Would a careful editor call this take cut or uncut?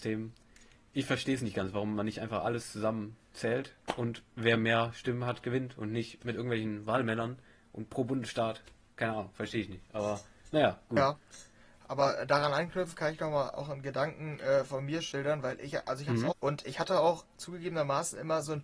cut